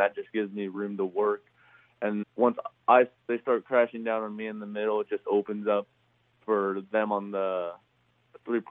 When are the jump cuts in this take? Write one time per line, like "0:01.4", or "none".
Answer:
0:02.2